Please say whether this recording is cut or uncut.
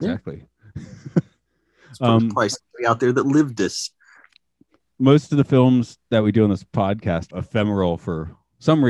cut